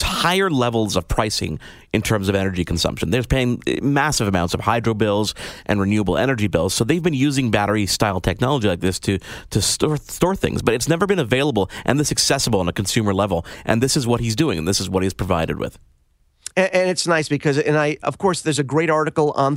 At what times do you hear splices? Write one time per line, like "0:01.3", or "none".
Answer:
0:18.0